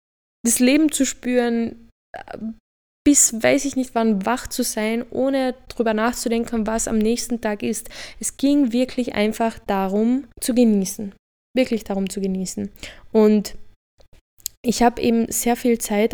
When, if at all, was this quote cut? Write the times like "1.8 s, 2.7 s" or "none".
10.3 s